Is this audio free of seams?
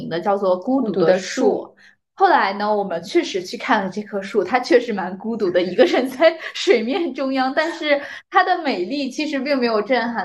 yes; 0 cuts

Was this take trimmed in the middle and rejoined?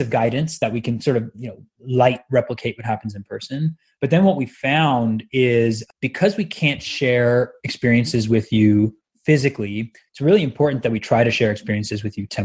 yes; 1 cut; at 5.9 s

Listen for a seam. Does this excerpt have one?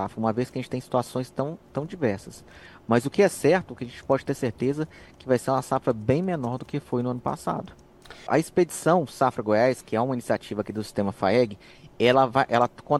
yes; 1 cut; at 8.3 s

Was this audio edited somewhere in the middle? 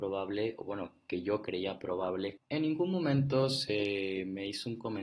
no; 0 cuts

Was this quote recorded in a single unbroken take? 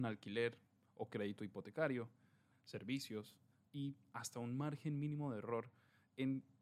no; 1 cut; at 2.5 s

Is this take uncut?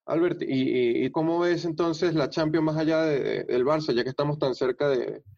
no; 1 cut; at 1.1 s

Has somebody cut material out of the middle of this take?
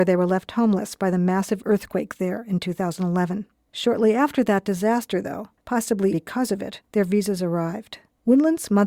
yes; 1 cut; at 6.1 s

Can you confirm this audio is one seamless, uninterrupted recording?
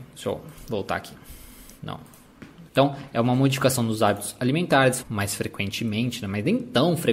no; 2 cuts; at 2.7 s, 5.0 s

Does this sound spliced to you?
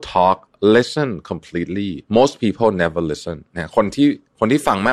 yes; 1 cut; at 2.1 s

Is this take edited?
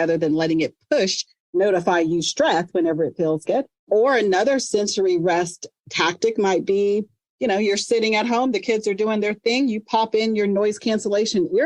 yes; 1 cut; at 3.4 s

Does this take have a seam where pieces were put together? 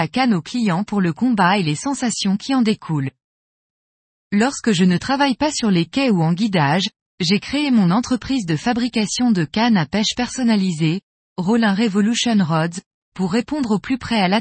no; 0 cuts

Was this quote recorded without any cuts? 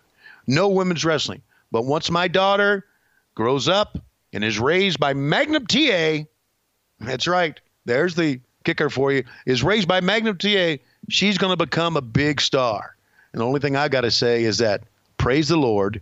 yes; 0 cuts

